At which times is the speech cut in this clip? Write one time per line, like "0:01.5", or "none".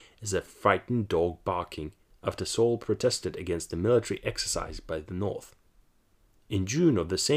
none